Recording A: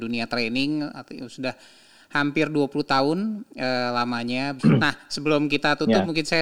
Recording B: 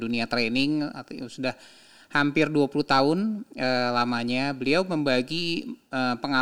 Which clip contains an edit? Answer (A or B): A